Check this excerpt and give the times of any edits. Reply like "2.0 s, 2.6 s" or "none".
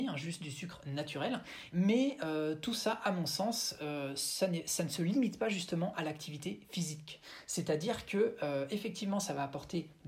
1.7 s